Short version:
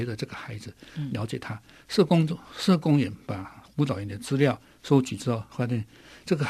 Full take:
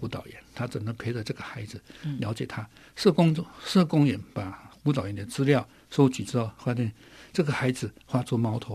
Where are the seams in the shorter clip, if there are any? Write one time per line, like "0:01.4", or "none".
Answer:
none